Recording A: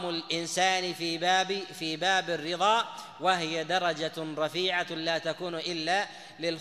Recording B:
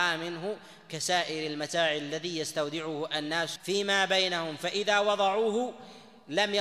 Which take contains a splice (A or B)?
B